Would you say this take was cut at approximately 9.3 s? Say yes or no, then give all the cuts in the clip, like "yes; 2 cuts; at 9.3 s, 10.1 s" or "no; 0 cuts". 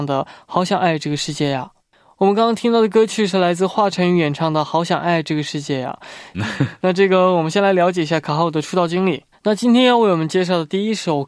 yes; 3 cuts; at 1.8 s, 6.3 s, 9.3 s